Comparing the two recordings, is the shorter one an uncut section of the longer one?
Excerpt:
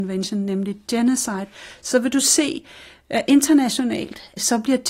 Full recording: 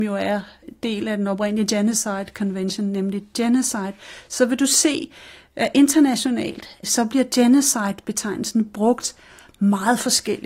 yes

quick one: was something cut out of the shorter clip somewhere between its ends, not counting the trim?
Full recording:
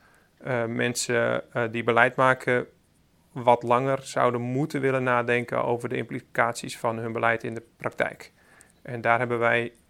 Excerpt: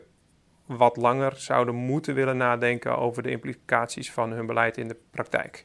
no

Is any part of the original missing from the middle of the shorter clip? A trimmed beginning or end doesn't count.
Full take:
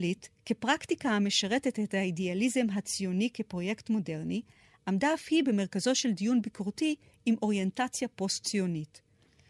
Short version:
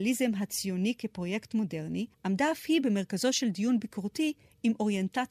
yes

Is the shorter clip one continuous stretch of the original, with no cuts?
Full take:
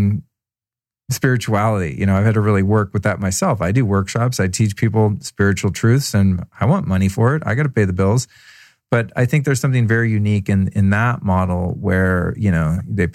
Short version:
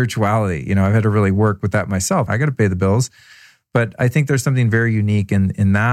no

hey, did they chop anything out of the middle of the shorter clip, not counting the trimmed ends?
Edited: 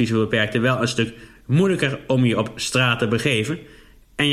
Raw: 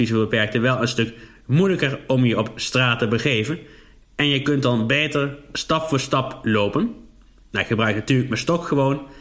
no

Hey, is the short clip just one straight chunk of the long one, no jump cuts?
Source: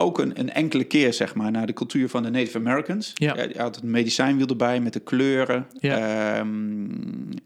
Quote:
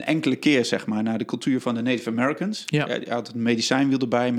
yes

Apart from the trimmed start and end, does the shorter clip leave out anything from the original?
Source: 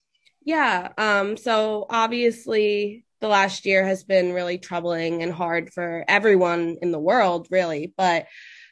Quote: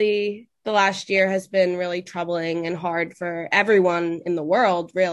no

